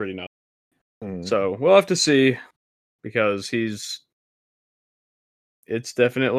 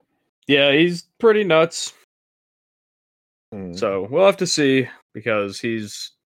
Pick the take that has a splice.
second; 2 cuts; at 3.3 s, 5.0 s

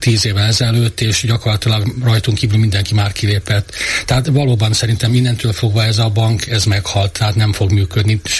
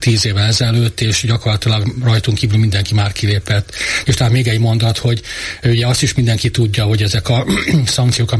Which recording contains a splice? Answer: second; 1 cut; at 4.0 s

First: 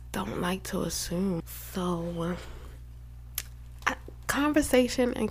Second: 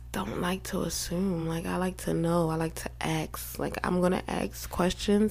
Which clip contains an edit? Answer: first; 1 cut; at 1.4 s

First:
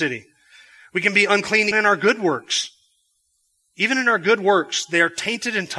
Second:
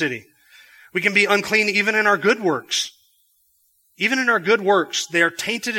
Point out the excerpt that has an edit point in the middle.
first; 1 cut; at 1.7 s

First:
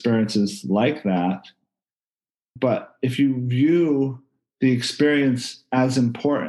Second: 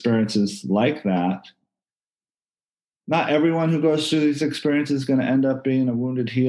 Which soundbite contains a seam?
first; 1 cut; at 2.6 s

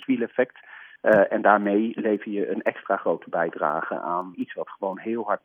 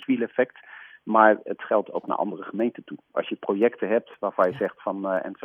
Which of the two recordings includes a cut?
first; 2 cuts; at 1.0 s, 4.3 s

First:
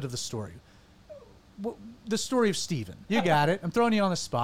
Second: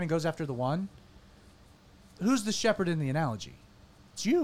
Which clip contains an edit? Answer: first; 1 cut; at 3.1 s

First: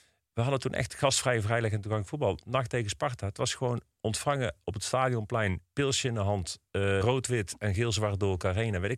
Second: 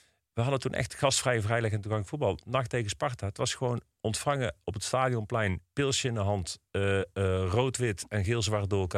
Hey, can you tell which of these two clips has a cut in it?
first; 1 cut; at 7.0 s

